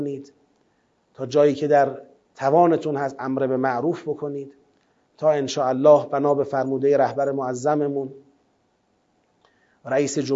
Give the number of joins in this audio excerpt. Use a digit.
0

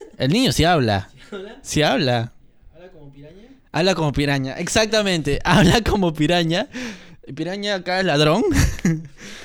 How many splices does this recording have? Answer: 0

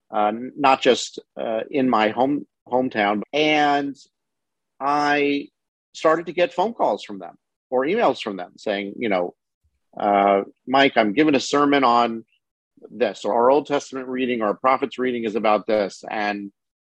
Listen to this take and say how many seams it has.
2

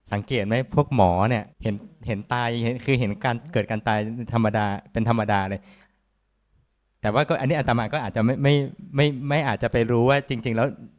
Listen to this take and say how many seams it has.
1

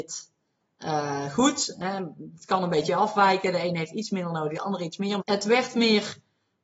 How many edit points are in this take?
1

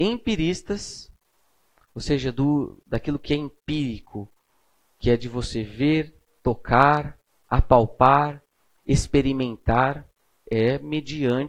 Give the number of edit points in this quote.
1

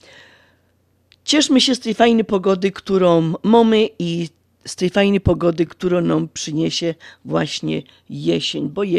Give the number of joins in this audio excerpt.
0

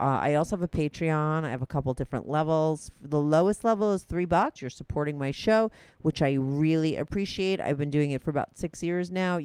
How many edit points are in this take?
1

